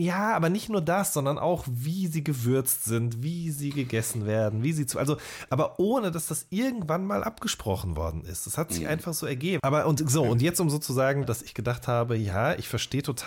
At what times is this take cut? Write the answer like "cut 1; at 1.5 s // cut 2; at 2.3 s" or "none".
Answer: cut 1; at 9.6 s // cut 2; at 11.2 s